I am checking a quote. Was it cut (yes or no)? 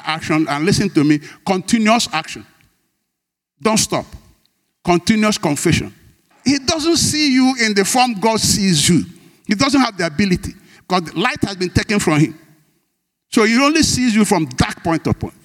yes